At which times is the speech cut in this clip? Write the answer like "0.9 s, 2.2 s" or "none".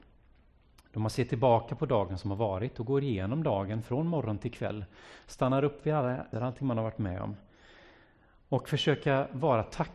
6.3 s